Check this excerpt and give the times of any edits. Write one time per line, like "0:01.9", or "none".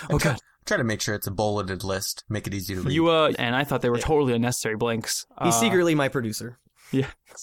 0:03.3